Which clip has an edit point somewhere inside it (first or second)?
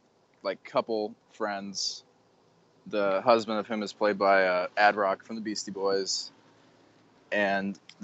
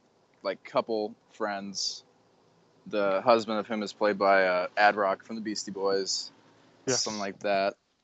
second